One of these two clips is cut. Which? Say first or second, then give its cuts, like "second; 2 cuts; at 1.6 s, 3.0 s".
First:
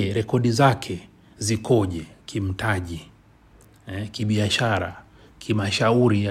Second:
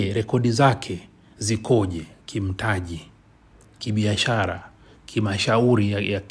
second; 1 cut; at 3.8 s